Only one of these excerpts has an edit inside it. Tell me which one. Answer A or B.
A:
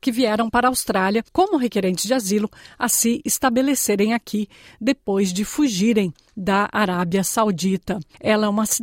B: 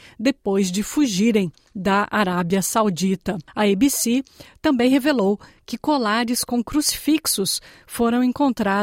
B